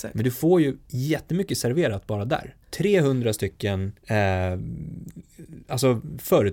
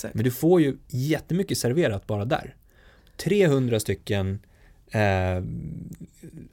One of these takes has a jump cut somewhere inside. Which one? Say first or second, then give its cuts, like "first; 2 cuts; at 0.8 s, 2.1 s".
first; 2 cuts; at 2.6 s, 4.0 s